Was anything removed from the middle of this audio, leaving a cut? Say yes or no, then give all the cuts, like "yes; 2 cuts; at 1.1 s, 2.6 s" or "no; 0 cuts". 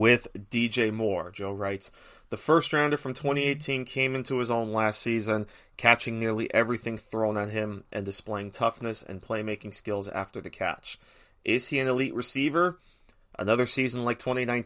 no; 0 cuts